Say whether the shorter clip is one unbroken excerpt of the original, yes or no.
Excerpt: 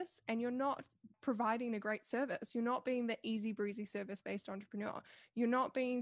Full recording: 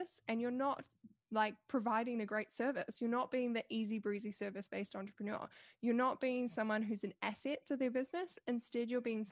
no